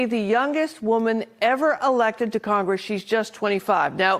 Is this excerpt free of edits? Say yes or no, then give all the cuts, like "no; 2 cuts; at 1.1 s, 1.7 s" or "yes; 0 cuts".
yes; 0 cuts